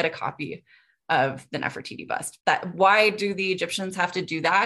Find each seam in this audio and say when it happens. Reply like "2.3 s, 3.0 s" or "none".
2.4 s